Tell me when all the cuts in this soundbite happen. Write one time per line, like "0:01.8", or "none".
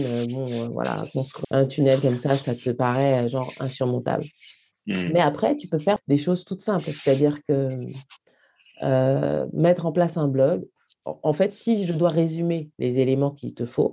0:01.4
0:06.0